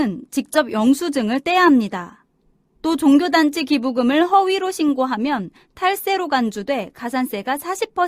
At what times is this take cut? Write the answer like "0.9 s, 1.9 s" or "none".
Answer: 2.7 s

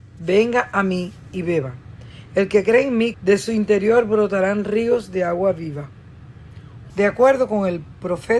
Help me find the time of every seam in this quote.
3.1 s, 6.9 s

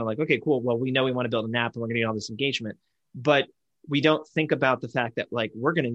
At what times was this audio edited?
none

